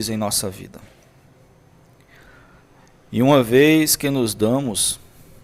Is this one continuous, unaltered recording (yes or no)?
yes